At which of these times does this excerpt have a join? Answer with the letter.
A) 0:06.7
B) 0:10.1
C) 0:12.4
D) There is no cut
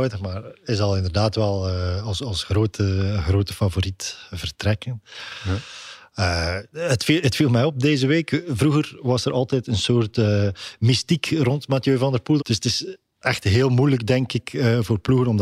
C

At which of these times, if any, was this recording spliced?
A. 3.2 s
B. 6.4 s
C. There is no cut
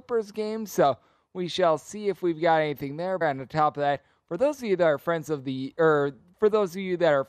A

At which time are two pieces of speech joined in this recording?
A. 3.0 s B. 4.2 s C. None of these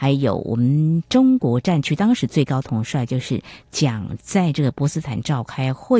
B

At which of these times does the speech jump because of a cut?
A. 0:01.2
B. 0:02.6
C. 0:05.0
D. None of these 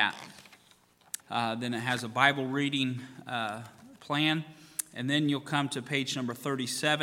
A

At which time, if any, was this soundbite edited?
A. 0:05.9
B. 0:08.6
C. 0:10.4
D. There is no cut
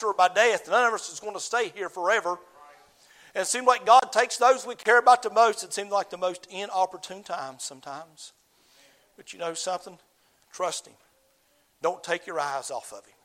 C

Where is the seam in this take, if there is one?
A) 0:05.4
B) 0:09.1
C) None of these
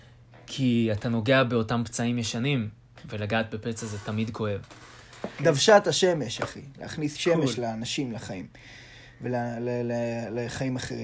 A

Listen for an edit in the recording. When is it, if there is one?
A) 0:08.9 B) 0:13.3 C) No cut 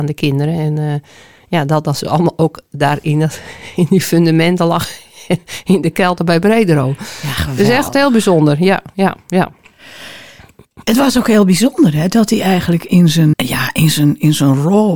B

